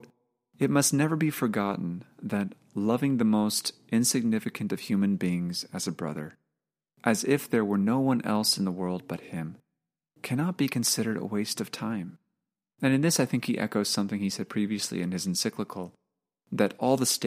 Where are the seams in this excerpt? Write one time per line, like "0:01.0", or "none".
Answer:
0:12.7